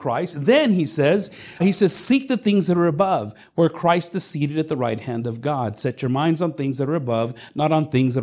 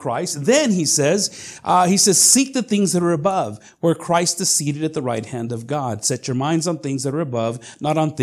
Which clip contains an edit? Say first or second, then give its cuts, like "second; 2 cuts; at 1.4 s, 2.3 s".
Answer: first; 1 cut; at 1.6 s